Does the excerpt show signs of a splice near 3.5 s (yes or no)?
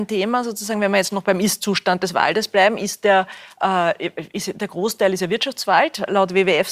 no